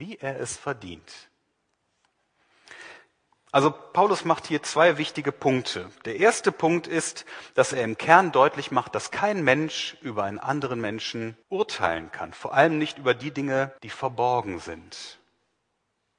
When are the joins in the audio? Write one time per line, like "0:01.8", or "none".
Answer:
0:11.4
0:13.8